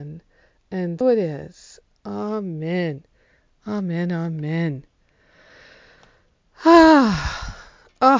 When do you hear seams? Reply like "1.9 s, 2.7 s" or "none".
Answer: 1.0 s